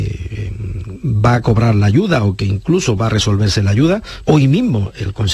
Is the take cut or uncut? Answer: cut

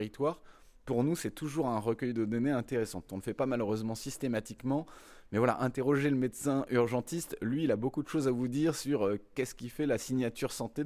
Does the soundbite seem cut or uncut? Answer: uncut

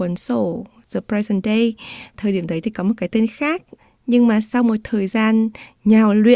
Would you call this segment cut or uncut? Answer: uncut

